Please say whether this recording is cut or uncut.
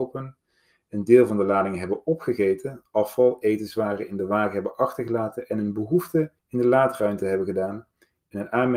cut